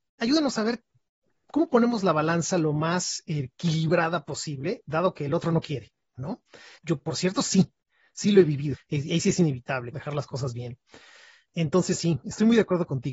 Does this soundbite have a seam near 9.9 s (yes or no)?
yes